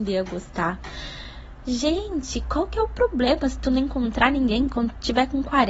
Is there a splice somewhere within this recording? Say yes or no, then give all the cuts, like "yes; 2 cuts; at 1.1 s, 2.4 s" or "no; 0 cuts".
no; 0 cuts